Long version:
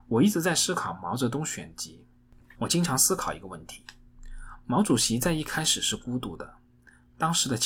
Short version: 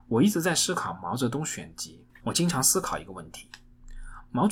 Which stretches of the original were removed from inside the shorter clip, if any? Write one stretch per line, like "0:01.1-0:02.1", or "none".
0:02.1-0:02.4

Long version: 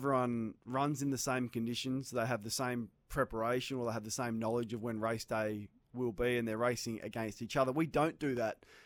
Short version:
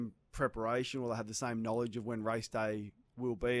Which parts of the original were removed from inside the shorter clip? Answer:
none

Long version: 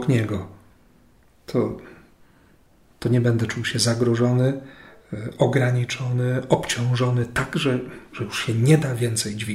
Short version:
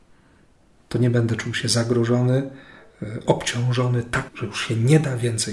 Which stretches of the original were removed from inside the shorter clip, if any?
0:05.4-0:06.5
0:07.5-0:08.1

